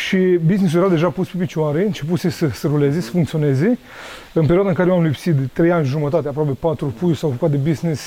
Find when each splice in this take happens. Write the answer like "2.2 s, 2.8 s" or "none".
none